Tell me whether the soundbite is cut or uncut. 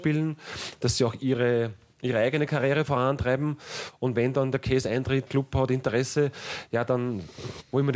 cut